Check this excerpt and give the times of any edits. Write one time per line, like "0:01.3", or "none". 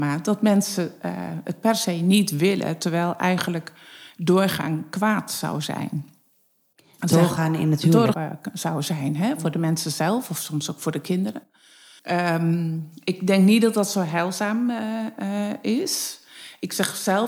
0:08.1
0:12.0